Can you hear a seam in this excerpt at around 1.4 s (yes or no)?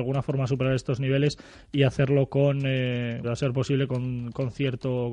no